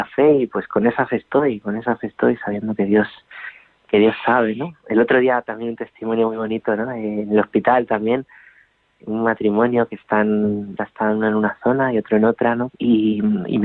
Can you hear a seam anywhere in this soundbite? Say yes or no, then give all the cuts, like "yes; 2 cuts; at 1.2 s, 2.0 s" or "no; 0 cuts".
yes; 2 cuts; at 10.8 s, 12.7 s